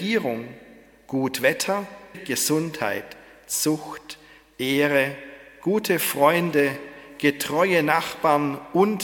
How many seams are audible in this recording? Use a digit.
1